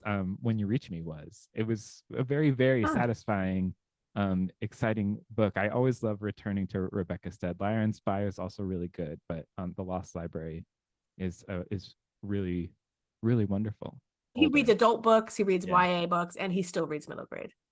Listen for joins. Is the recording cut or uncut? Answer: cut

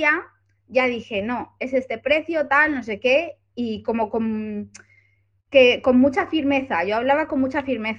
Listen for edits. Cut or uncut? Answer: uncut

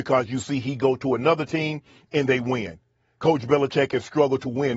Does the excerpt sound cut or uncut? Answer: uncut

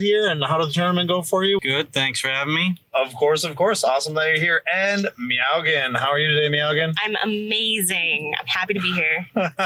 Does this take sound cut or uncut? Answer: cut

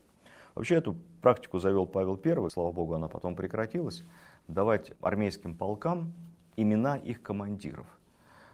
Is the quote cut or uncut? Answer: uncut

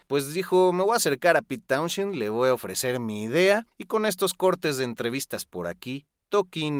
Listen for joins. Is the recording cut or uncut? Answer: cut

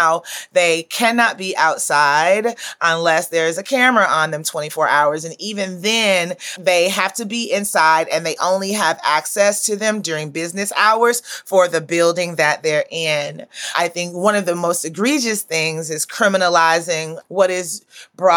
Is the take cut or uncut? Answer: uncut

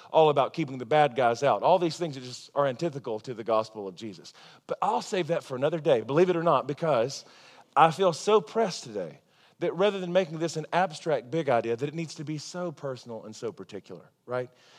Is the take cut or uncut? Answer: uncut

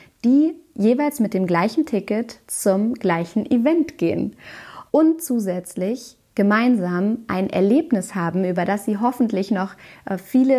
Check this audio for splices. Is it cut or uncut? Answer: cut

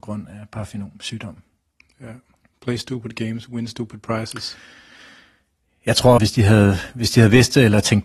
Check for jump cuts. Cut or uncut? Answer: cut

